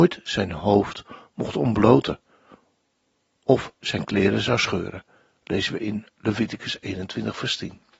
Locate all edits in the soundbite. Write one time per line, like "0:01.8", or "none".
none